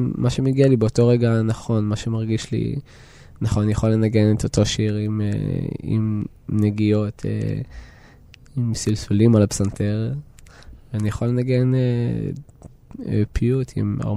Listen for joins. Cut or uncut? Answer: uncut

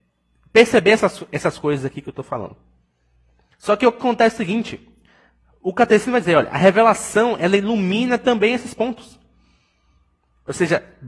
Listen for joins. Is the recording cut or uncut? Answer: uncut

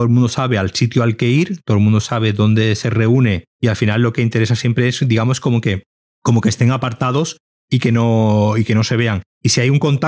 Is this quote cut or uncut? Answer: cut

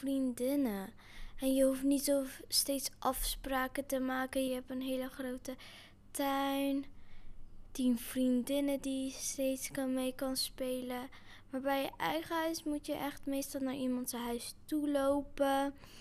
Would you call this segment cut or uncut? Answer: cut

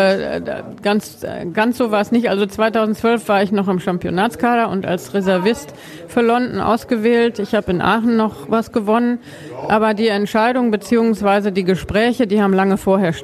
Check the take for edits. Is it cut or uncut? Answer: uncut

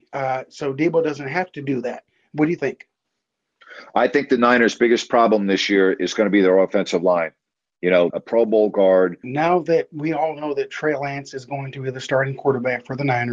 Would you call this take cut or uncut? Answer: cut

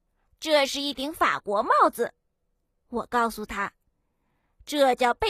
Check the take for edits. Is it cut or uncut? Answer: uncut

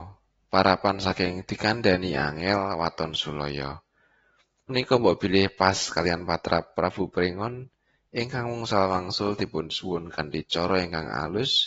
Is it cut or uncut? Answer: uncut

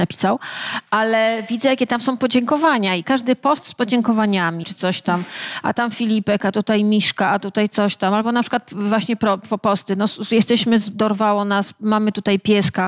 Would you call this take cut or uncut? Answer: cut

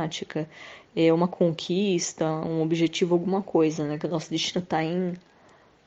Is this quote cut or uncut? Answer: uncut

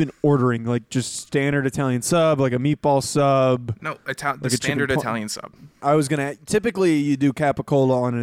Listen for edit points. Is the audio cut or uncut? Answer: cut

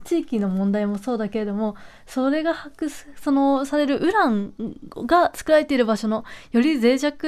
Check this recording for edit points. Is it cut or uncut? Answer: uncut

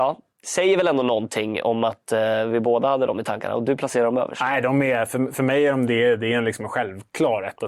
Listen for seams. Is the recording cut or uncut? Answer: uncut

